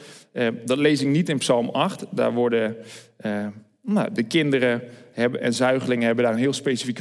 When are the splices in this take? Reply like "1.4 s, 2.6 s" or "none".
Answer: none